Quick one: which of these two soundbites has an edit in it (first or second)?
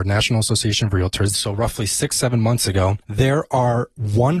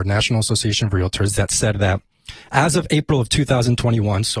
first